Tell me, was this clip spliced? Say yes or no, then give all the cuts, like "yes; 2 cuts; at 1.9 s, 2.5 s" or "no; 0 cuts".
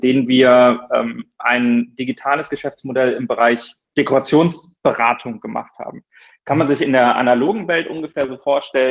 no; 0 cuts